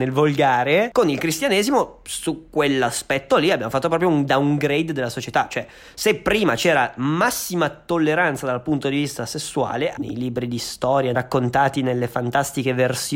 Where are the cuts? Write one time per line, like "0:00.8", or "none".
0:10.0
0:11.1